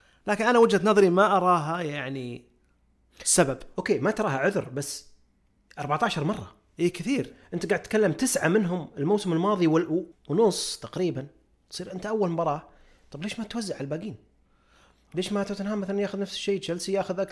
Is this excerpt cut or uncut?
cut